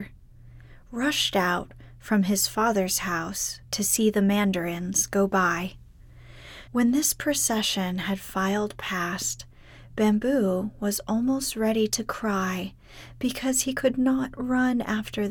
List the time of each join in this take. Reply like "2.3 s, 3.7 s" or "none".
6.7 s